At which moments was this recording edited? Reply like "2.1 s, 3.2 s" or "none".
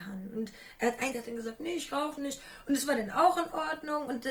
1.1 s